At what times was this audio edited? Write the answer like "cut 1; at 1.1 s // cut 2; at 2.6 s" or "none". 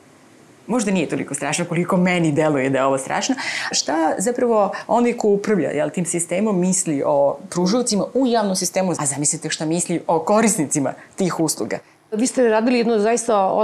cut 1; at 3.7 s // cut 2; at 9.0 s